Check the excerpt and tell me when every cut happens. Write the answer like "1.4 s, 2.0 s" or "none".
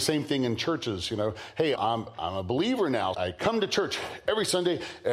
1.8 s, 3.1 s